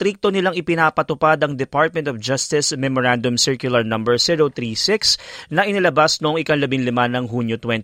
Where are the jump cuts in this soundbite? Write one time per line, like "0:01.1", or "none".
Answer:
none